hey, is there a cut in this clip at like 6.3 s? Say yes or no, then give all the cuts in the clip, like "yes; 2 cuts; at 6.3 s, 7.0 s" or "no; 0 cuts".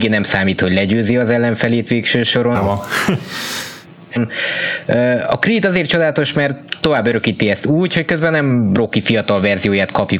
no; 2 cuts; at 2.5 s, 4.2 s